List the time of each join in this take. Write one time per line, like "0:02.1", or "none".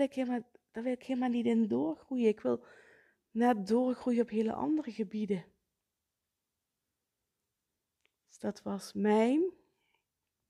none